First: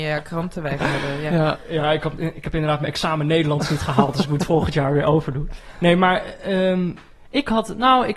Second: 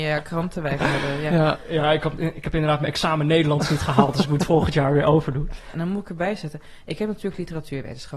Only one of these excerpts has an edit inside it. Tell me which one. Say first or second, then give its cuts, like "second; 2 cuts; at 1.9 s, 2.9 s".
second; 1 cut; at 5.7 s